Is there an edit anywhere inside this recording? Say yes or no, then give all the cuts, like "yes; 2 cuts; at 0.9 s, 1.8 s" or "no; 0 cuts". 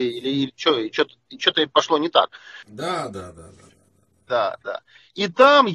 yes; 1 cut; at 2.6 s